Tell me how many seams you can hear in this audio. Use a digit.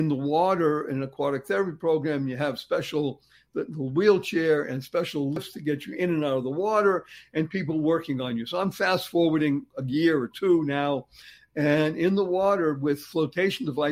0